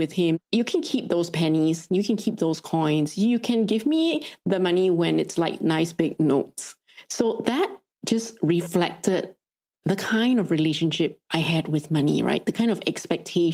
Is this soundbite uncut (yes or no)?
yes